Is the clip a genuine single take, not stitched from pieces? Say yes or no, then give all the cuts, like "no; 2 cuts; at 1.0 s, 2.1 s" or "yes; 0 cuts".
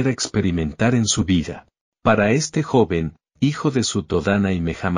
yes; 0 cuts